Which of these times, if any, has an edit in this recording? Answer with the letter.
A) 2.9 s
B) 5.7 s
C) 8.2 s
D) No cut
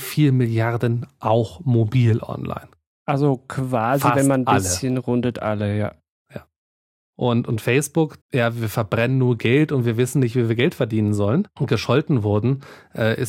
C